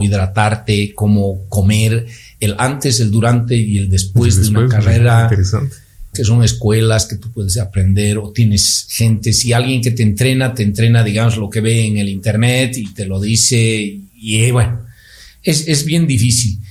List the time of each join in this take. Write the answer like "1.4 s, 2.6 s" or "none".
6.1 s, 14.1 s, 15.7 s